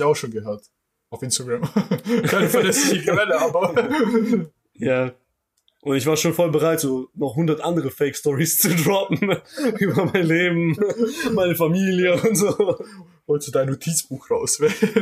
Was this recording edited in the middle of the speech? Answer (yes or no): no